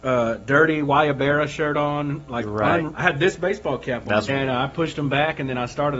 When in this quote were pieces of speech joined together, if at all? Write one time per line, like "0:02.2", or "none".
0:02.9
0:04.3

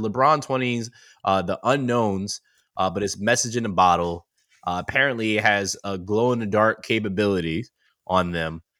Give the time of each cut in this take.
none

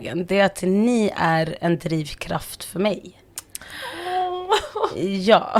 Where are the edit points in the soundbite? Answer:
none

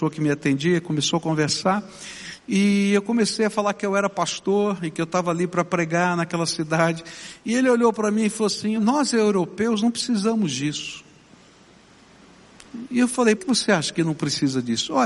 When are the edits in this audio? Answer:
0:08.8
0:13.4

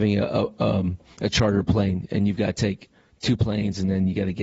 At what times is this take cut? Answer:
none

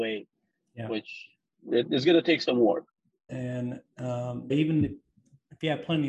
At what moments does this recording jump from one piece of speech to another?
0:03.3
0:04.5

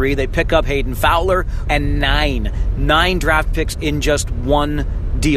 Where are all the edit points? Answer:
0:01.7

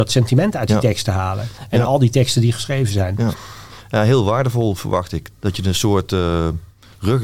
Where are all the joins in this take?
0:05.3

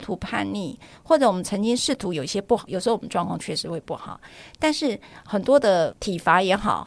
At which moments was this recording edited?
0:02.7

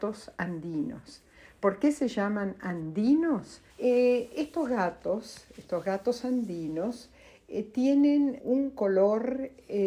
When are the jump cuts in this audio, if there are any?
0:03.7
0:08.4

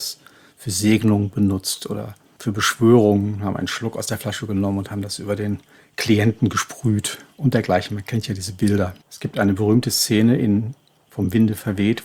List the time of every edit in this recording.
0:09.0

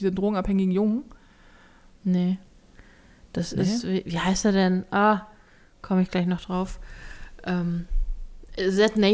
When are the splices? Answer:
none

